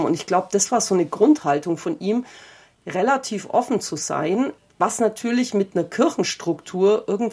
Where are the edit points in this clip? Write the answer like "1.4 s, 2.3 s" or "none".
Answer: none